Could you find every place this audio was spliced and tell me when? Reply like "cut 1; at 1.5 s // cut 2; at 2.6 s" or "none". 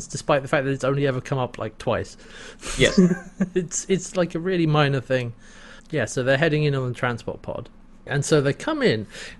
cut 1; at 5.8 s